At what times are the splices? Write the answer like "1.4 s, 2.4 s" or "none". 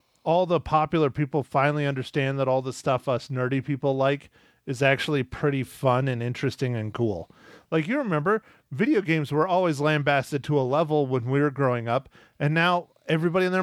none